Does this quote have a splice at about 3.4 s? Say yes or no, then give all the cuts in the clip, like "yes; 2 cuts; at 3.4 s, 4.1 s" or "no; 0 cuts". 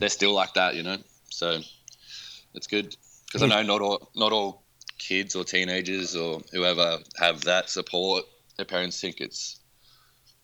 no; 0 cuts